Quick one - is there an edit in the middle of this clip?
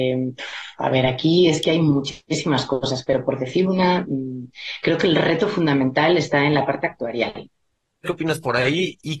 yes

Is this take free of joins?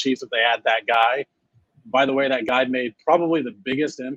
yes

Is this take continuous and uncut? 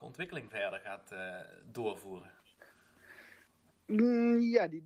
yes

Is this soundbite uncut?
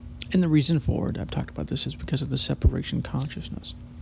yes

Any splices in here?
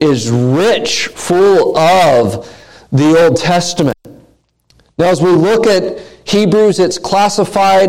no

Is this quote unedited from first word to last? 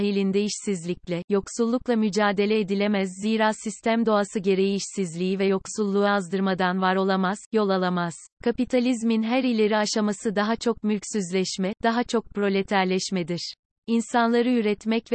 no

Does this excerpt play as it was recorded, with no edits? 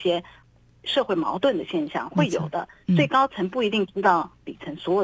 yes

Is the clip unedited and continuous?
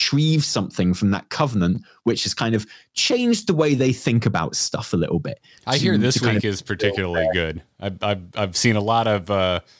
yes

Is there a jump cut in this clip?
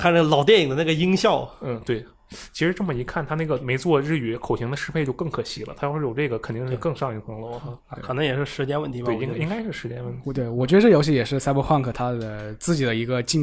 no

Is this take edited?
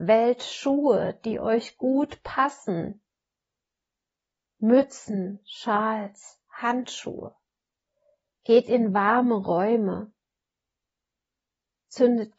no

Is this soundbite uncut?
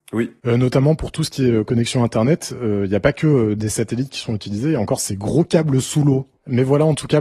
yes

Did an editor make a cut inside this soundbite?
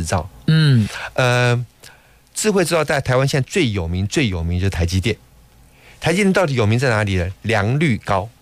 no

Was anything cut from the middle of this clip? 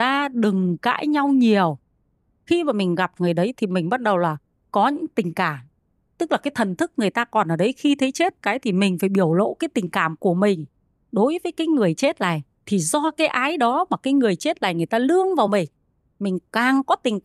no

